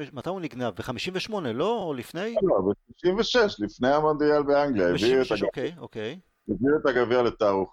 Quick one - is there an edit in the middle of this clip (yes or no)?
no